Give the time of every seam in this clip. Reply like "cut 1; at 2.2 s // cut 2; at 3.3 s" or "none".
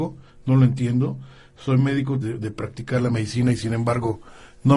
cut 1; at 2.2 s